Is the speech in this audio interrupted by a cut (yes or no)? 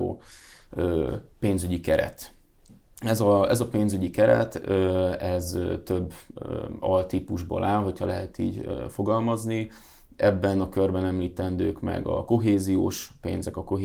no